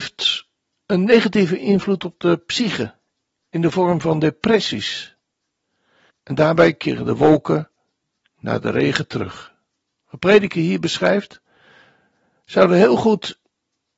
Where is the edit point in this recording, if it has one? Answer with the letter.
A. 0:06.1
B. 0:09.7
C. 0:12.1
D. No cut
A